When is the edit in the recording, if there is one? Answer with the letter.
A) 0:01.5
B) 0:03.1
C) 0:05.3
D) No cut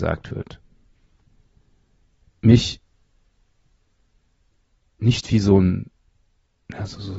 D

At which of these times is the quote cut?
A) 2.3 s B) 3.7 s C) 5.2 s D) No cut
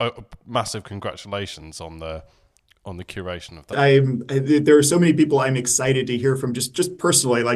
B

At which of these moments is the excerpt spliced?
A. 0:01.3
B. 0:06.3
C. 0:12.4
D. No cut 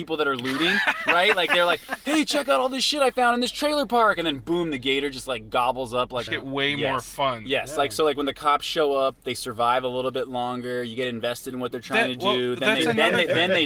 B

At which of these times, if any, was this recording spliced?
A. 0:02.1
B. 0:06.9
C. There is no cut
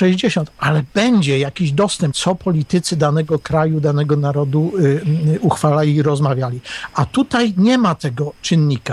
A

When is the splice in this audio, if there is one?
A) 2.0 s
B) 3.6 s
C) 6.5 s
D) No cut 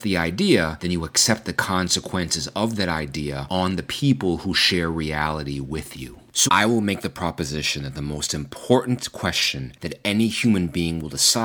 C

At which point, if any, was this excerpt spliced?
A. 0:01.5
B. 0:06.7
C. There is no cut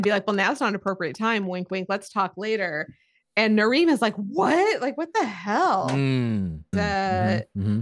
B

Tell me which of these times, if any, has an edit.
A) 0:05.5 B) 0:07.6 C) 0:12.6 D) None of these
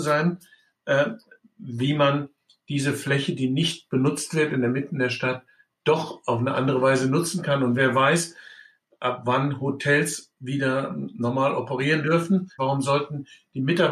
C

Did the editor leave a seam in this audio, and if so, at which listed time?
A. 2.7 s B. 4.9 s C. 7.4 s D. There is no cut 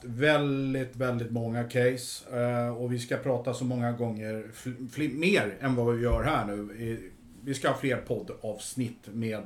D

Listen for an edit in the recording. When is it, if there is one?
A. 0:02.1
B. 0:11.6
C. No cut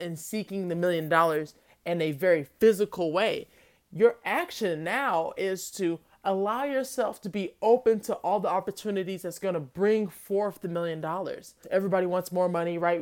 B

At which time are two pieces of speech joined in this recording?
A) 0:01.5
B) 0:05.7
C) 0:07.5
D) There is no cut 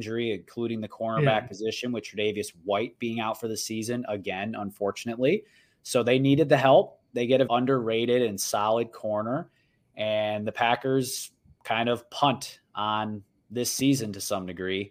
C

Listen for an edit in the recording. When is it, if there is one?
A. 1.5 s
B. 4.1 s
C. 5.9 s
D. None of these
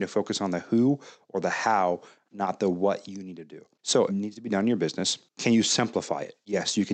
B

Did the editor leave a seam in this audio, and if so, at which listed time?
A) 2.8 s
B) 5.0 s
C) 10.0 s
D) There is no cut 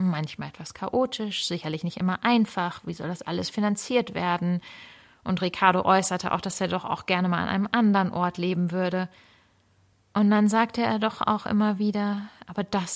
D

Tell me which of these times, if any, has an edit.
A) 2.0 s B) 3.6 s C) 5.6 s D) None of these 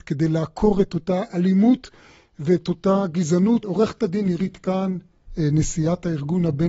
B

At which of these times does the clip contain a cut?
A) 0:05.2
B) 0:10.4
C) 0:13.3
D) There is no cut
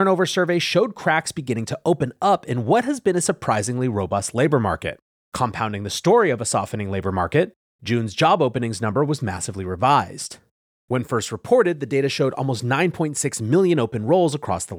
A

